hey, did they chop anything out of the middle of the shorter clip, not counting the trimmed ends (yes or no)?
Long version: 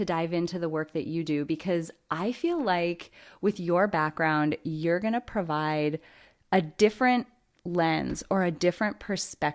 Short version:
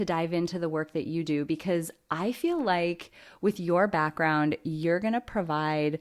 no